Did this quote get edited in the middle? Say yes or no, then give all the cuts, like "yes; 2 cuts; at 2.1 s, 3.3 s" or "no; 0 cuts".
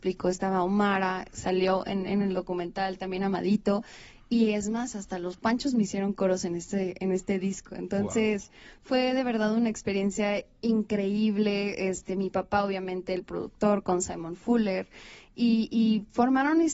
no; 0 cuts